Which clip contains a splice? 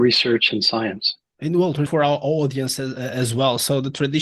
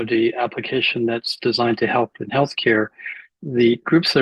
first; 1 cut; at 1.9 s

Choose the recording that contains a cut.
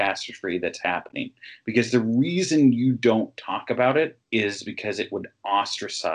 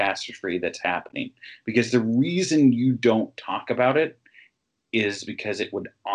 first; 1 cut; at 4.2 s

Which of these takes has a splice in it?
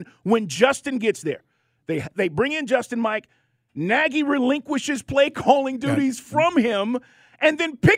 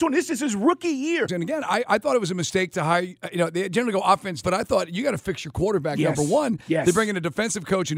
second; 2 cuts; at 1.3 s, 4.4 s

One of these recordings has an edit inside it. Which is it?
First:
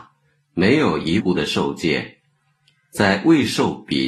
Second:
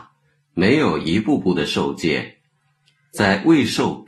first; 1 cut; at 1.2 s

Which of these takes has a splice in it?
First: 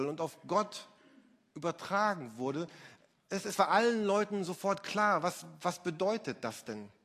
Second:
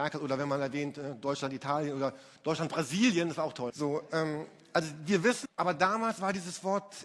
second; 2 cuts; at 3.7 s, 5.4 s

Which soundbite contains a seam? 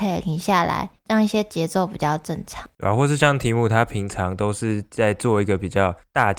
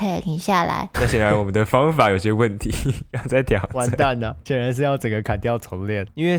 second; 1 cut; at 0.9 s

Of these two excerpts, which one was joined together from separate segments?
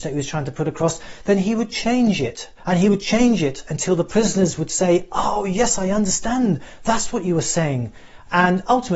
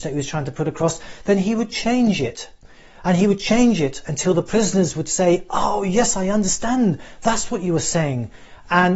first; 1 cut; at 2.6 s

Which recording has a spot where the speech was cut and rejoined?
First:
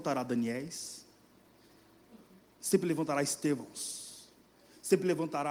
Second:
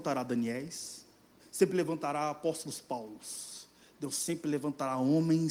second; 1 cut; at 1.4 s

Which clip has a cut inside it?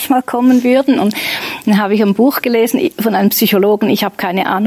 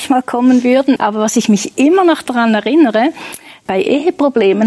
second; 2 cuts; at 1.0 s, 3.7 s

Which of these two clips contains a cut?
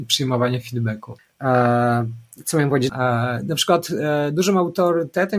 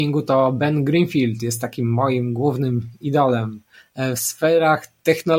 first; 1 cut; at 2.9 s

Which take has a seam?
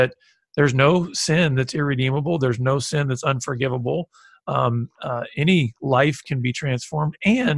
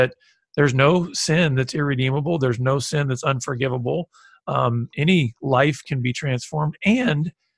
second; 1 cut; at 4.9 s

